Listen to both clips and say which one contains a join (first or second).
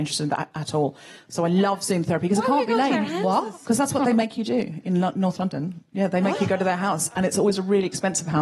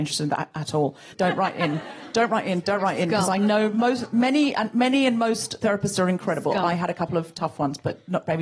second